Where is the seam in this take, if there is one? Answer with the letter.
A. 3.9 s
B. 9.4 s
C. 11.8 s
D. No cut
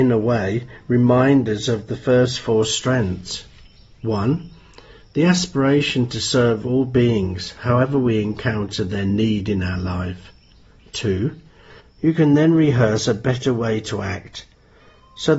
C